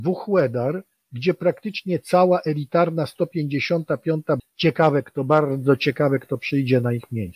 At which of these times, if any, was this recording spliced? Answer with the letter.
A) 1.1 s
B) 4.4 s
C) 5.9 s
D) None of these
B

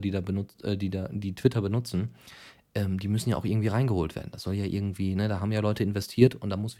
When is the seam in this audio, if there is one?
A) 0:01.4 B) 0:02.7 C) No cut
C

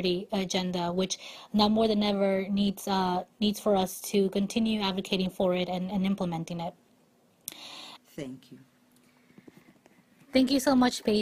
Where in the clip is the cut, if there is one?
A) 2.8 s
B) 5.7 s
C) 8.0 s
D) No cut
C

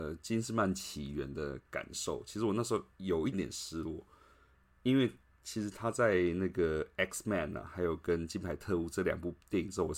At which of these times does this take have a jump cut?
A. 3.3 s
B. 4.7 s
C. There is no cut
A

